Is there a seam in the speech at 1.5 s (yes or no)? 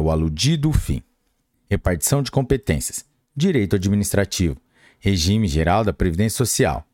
yes